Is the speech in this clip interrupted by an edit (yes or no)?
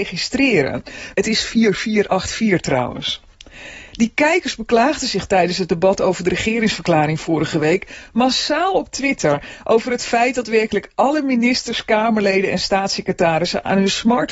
yes